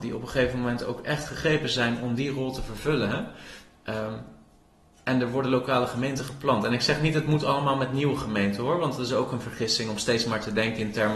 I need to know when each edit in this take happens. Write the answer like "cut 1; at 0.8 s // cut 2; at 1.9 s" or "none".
none